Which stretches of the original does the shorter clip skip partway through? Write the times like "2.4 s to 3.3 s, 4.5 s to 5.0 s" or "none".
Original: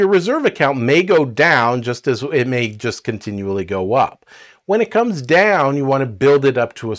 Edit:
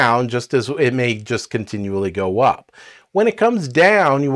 none